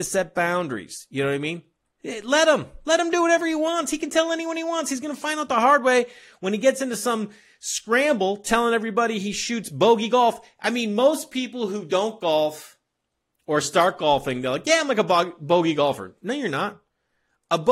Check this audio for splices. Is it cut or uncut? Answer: uncut